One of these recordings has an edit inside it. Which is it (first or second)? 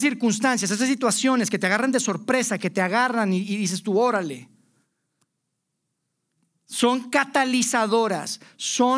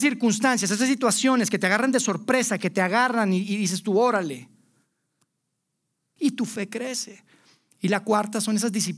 second